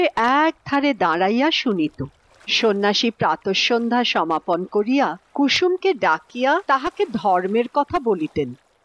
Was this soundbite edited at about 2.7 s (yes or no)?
no